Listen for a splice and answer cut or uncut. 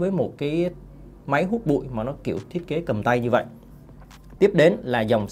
uncut